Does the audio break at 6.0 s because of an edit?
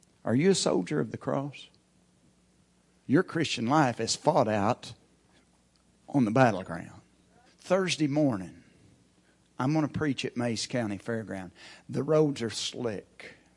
no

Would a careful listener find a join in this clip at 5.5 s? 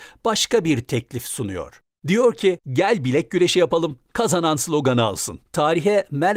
yes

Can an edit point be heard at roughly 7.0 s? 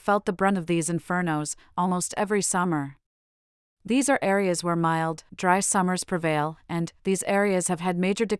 yes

